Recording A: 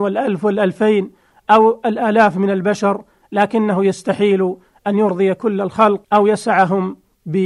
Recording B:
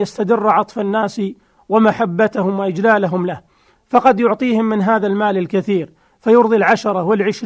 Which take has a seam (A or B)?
A